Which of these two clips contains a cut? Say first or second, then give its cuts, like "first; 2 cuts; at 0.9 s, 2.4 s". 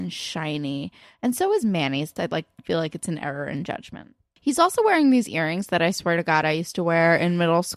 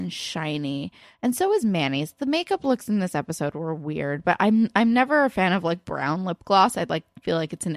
first; 2 cuts; at 2.2 s, 4.4 s